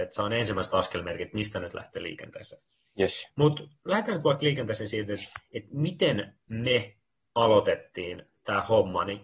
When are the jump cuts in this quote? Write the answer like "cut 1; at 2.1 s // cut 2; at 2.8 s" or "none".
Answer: none